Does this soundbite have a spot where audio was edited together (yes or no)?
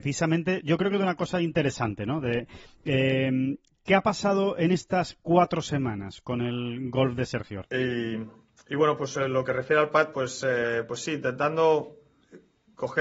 yes